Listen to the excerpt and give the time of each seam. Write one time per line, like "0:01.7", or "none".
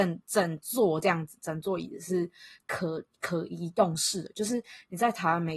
none